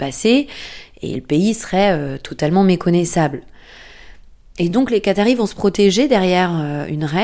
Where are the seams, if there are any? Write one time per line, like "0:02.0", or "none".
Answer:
none

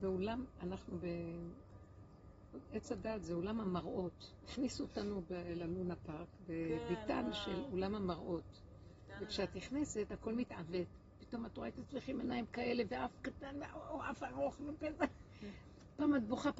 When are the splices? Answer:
none

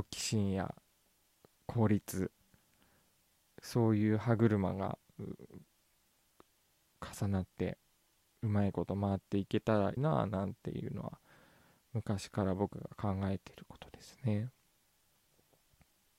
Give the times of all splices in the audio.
0:10.0

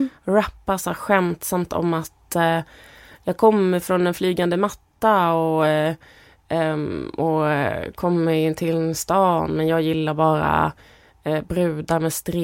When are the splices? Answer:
none

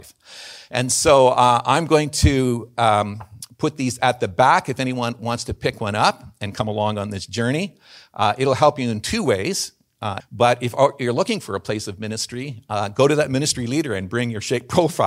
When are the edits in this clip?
0:10.2

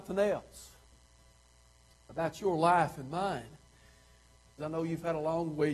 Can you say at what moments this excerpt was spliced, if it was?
0:04.6

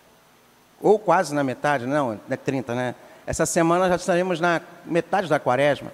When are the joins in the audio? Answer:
0:02.7

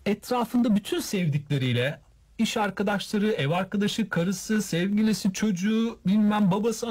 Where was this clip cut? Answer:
none

